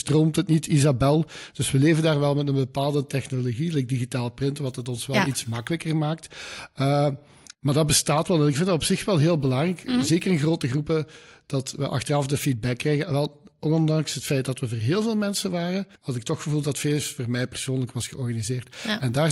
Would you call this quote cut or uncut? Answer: cut